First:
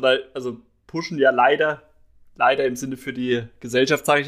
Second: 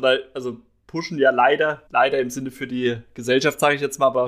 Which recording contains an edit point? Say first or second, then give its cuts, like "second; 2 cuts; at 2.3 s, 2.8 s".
second; 1 cut; at 1.9 s